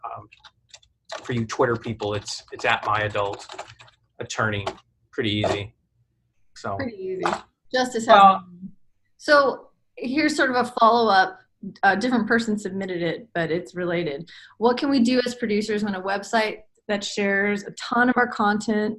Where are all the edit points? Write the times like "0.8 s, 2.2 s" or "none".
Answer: none